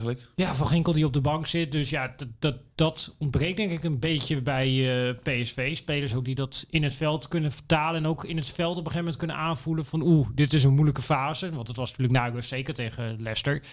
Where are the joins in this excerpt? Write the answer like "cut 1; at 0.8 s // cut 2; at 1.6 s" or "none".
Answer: none